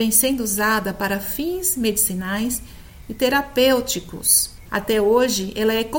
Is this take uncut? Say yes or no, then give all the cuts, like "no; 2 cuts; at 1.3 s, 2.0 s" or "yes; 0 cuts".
no; 1 cut; at 4.6 s